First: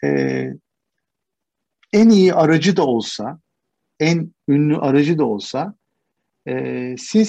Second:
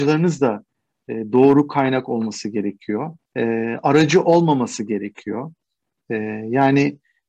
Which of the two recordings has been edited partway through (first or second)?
second